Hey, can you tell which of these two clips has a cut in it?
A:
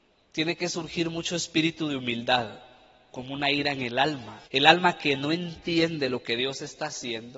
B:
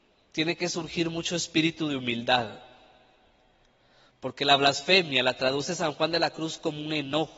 A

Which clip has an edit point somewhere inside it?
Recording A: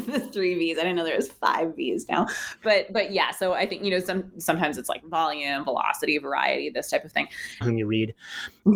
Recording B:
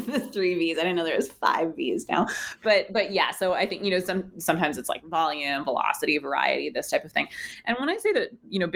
A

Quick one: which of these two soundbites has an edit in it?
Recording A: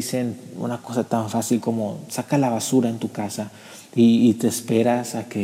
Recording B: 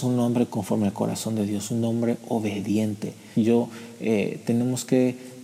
B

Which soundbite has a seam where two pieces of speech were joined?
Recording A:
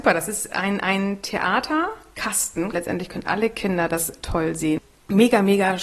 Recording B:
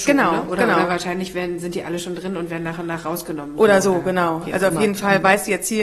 A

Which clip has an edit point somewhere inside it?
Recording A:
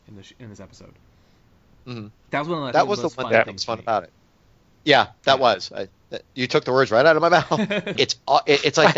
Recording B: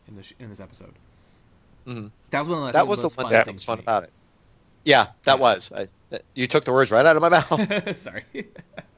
A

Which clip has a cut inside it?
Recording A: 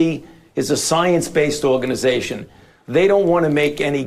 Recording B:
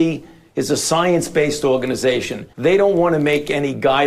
B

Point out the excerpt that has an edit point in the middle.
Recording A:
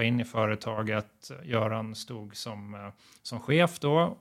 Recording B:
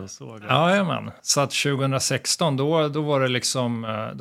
B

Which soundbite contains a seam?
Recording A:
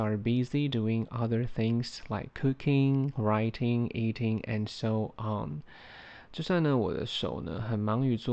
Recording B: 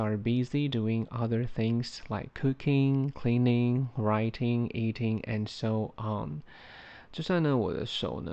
A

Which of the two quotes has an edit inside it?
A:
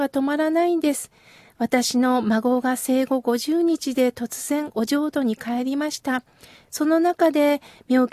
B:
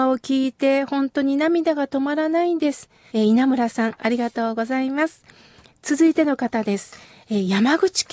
B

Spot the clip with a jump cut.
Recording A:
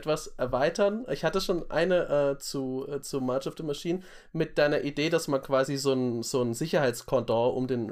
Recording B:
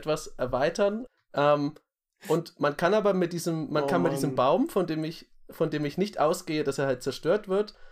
B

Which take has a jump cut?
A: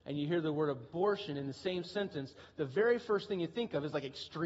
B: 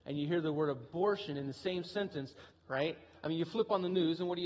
B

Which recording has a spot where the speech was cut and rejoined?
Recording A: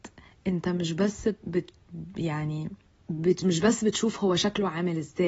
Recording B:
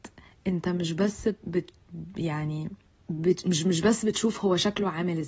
A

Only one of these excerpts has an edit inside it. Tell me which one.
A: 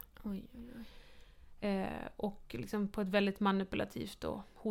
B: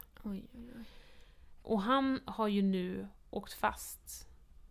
B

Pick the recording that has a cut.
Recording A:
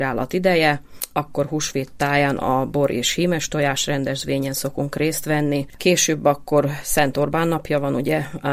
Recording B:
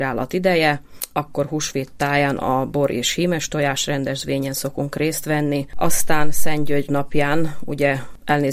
A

